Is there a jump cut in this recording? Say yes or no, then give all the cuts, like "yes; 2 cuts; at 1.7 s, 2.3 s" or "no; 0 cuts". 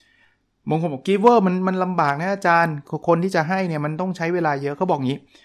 no; 0 cuts